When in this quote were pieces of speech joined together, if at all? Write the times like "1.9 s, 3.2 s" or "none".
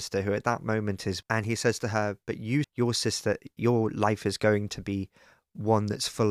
1.2 s, 2.6 s

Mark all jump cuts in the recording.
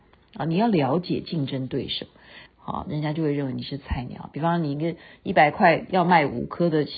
2.5 s

